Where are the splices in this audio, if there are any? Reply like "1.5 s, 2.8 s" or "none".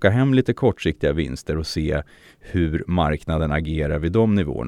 none